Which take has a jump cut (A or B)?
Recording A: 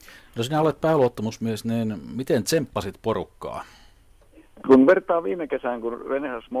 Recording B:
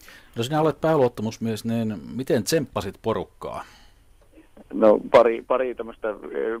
A